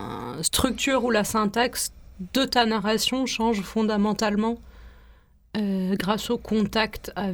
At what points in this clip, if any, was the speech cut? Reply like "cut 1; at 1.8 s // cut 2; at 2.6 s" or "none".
none